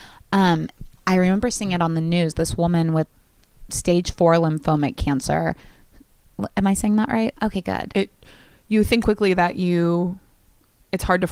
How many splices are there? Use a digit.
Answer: 2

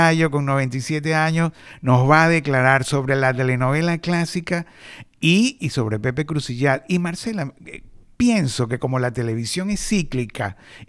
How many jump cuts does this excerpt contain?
0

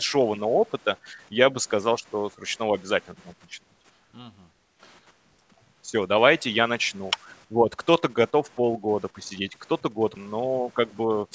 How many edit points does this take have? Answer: 2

